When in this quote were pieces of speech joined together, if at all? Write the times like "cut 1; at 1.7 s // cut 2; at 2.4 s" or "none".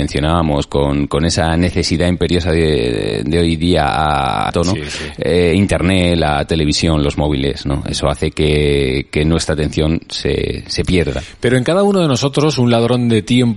cut 1; at 4.5 s